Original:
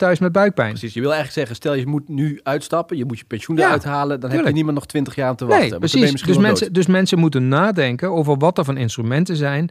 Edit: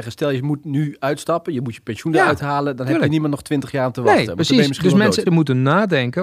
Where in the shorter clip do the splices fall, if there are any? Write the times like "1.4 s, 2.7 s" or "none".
5.3 s